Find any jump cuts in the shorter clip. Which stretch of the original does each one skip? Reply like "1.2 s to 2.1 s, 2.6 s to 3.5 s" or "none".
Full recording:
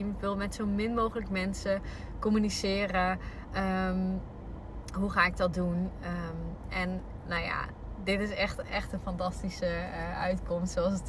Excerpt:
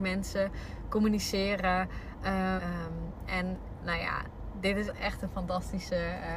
3.9 s to 6.0 s, 8.3 s to 8.6 s